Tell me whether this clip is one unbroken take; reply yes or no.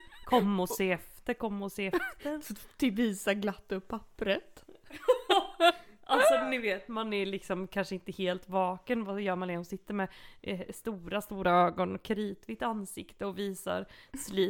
yes